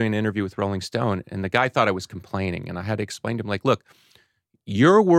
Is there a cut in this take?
no; 0 cuts

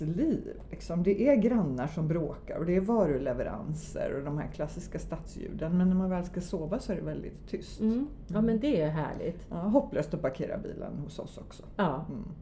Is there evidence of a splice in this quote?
no; 0 cuts

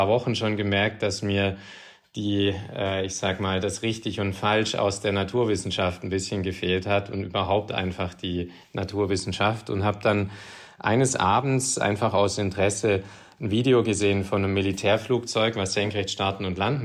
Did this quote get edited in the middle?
no; 0 cuts

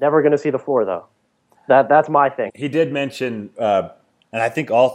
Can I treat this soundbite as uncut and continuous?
no; 1 cut; at 2.5 s

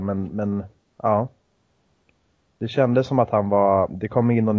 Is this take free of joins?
yes; 0 cuts

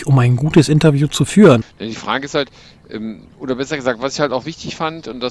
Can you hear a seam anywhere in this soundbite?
yes; 2 cuts; at 1.6 s, 3.3 s

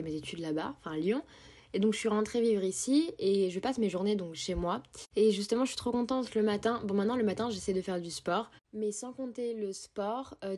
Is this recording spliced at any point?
no; 0 cuts

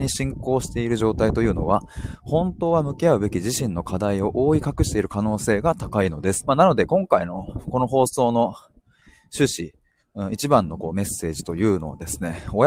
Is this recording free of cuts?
no; 1 cut; at 6.4 s

